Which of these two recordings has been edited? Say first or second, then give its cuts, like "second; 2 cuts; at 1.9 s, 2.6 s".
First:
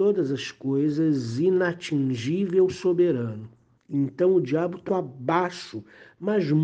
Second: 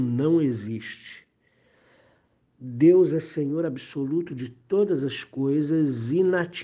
first; 2 cuts; at 3.8 s, 4.9 s